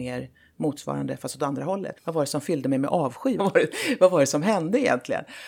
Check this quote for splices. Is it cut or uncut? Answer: cut